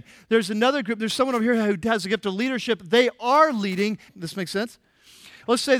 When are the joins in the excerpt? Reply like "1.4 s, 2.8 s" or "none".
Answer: 4.1 s